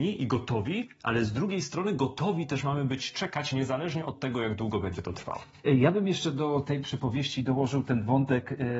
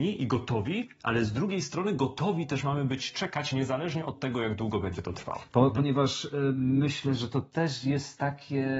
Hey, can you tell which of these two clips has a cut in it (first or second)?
second